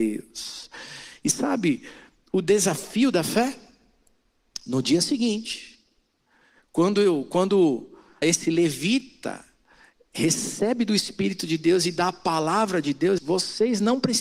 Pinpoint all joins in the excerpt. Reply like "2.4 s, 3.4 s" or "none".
8.2 s, 13.2 s

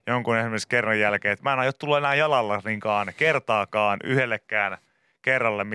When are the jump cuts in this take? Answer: none

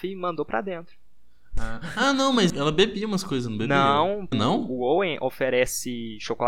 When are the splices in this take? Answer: 2.5 s, 4.3 s

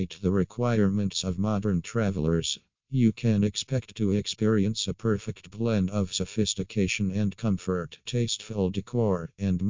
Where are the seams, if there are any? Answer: 8.0 s

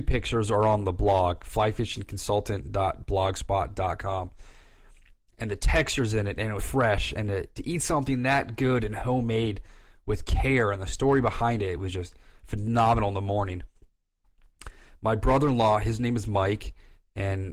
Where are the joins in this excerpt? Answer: 6.6 s

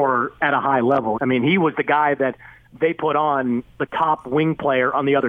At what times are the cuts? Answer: 1.1 s

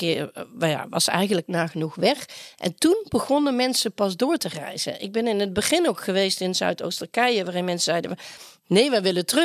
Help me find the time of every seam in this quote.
none

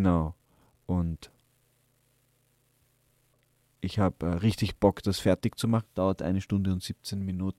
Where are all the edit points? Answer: 5.8 s

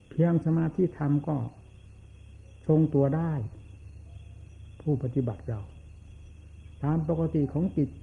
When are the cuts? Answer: none

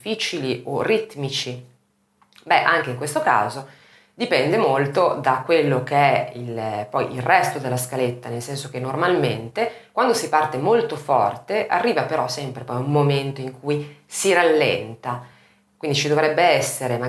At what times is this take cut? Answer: none

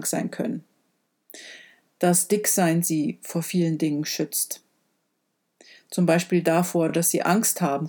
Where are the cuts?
none

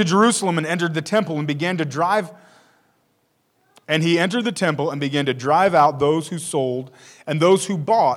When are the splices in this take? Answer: 3.8 s

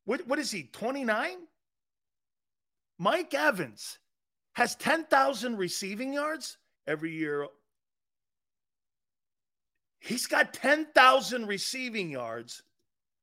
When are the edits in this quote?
6.8 s

